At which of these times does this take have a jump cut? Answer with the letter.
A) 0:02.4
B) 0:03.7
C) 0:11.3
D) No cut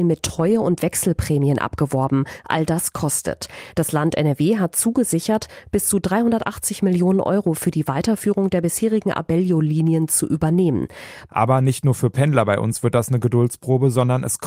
C